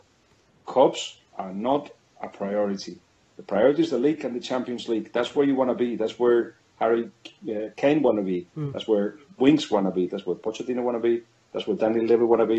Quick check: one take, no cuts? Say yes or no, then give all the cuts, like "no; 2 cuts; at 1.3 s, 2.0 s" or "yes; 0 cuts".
no; 1 cut; at 10.1 s